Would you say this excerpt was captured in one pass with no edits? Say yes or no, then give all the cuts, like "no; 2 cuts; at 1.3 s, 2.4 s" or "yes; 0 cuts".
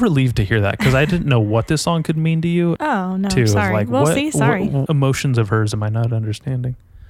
no; 2 cuts; at 2.8 s, 4.9 s